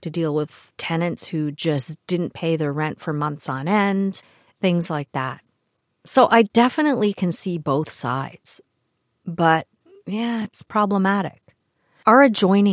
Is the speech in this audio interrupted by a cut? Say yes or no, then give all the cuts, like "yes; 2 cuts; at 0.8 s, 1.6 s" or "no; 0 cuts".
yes; 1 cut; at 4.5 s